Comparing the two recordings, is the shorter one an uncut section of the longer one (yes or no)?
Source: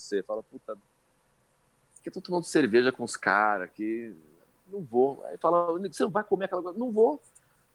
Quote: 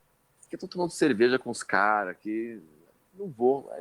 yes